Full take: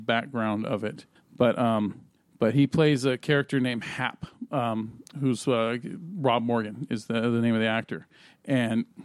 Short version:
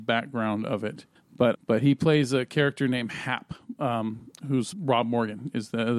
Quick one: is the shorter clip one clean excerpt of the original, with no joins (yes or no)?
no